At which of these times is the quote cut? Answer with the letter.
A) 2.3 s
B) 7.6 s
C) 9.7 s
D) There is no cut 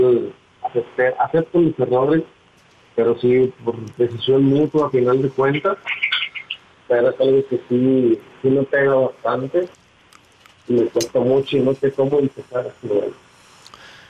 D